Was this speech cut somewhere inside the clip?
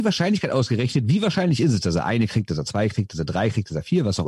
no; 0 cuts

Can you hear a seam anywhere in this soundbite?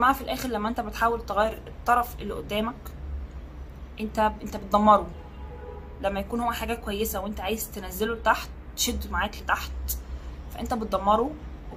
no; 0 cuts

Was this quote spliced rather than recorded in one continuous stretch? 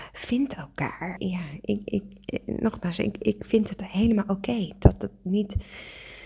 yes; 1 cut; at 1.2 s

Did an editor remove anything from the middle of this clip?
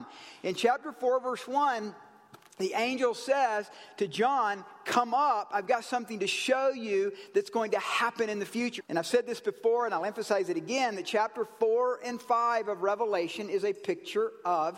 yes; 1 cut; at 8.8 s

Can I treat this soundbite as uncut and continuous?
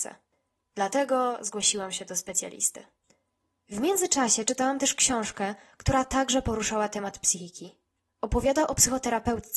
no; 1 cut; at 8.1 s

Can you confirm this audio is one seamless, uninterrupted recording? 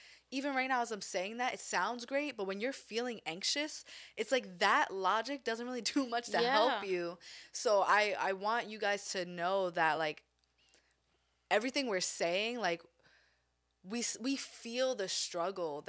yes; 0 cuts

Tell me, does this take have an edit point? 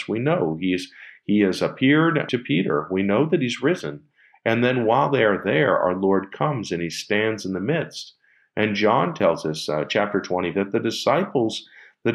yes; 2 cuts; at 2.3 s, 10.5 s

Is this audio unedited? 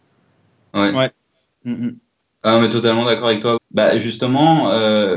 no; 1 cut; at 3.6 s

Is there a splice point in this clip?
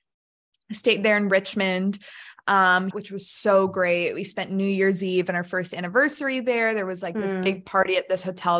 yes; 1 cut; at 2.9 s

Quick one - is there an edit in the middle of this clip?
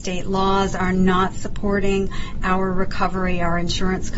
no; 0 cuts

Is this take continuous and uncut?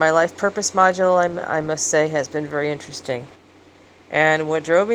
yes; 0 cuts

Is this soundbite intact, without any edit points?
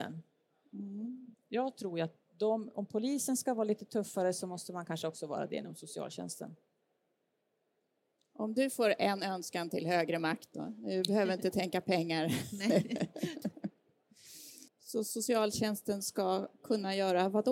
no; 2 cuts; at 1.3 s, 14.7 s

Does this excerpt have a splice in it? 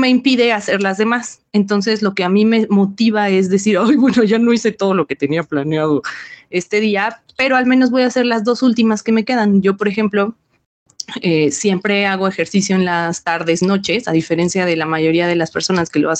no; 0 cuts

